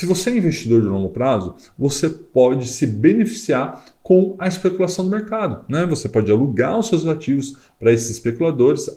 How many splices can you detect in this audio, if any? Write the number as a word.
zero